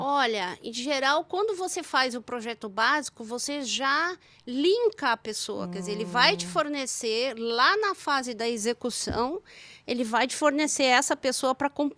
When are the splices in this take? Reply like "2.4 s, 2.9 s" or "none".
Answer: none

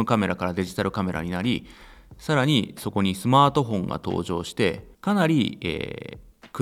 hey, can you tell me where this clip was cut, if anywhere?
4.9 s

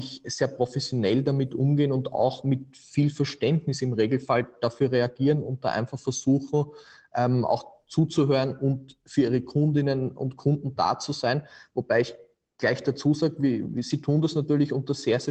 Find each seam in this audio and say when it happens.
none

